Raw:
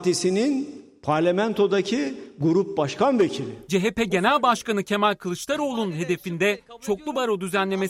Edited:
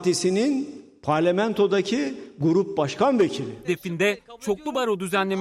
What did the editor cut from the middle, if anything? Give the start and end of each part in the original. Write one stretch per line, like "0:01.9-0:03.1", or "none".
0:03.6-0:06.1

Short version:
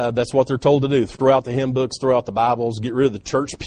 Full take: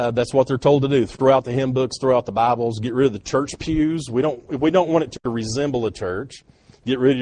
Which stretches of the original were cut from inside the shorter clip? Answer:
none

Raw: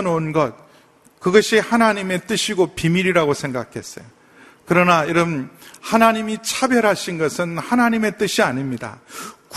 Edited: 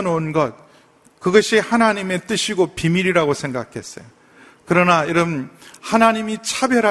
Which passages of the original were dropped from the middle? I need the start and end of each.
none

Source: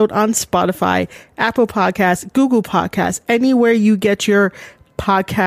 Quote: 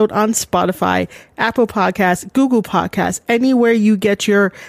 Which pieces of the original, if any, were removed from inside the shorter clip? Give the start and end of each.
none

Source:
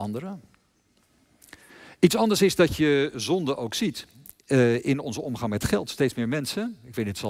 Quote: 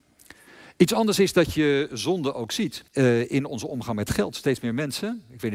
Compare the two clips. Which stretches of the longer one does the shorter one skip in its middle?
0:04.1-0:04.4

